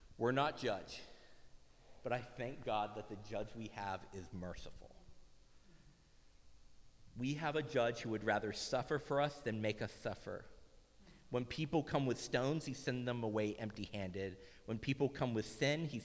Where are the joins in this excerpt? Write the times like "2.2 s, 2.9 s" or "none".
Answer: none